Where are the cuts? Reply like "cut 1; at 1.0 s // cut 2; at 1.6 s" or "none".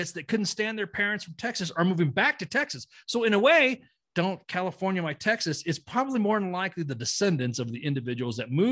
cut 1; at 4.1 s